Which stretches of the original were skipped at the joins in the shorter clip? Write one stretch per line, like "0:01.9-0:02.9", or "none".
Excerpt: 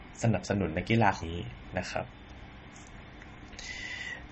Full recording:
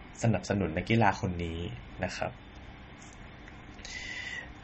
0:01.2-0:01.5

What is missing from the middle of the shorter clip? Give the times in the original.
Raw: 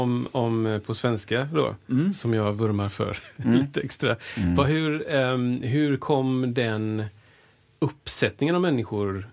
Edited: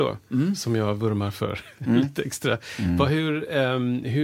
none

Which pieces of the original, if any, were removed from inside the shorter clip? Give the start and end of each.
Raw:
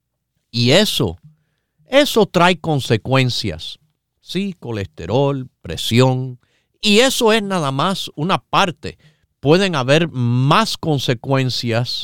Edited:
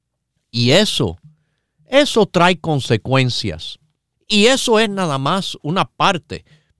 0:04.1-0:06.7

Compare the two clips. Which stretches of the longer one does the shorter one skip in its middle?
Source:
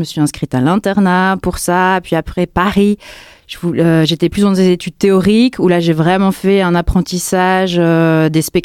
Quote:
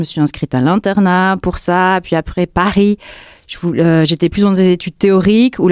none

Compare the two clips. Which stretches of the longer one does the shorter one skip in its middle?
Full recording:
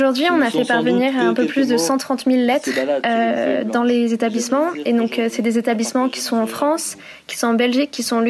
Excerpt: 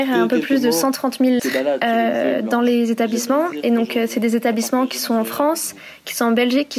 0:02.5-0:02.6

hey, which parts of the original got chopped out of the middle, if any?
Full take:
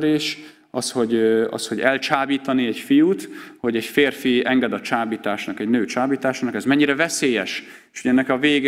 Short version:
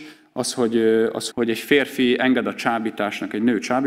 0:01.7-0:03.6

